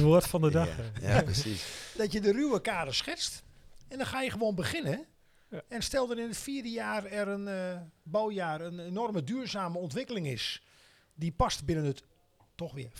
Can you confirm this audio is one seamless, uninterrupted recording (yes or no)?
yes